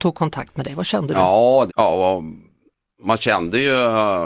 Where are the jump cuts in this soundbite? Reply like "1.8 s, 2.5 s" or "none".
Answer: 1.7 s